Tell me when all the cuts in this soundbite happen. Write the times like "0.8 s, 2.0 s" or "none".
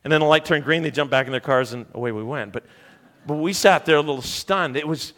none